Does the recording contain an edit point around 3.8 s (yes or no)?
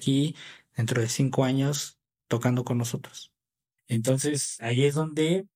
yes